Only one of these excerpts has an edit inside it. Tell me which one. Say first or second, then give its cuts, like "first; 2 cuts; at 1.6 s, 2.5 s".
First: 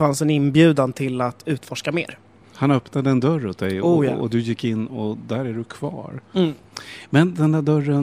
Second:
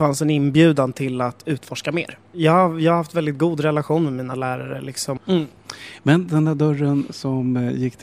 second; 2 cuts; at 2.3 s, 5.2 s